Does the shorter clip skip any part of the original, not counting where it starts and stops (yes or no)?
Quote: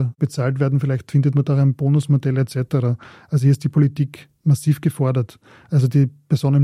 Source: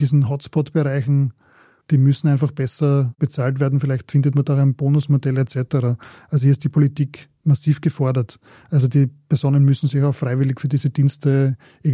no